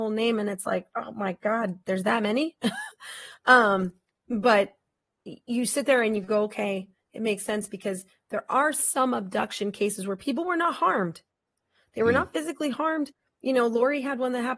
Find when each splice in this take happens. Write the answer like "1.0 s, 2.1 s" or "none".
none